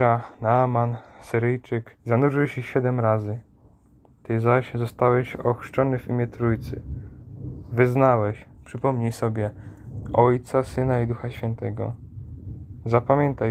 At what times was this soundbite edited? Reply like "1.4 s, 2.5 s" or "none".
2.0 s